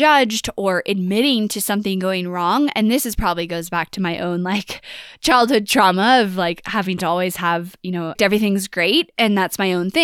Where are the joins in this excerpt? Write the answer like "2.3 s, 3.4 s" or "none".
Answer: 8.2 s